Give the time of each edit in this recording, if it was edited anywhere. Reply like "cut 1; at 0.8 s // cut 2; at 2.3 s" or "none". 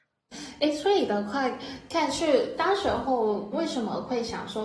cut 1; at 3.5 s